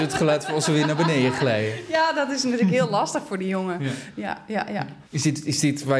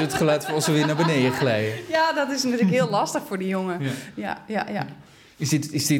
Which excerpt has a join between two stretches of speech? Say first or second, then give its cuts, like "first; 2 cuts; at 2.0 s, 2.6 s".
first; 1 cut; at 5.1 s